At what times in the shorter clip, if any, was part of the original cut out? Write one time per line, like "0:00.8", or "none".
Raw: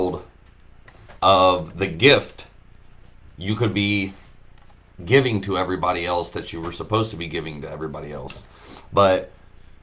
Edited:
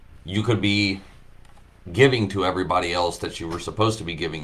none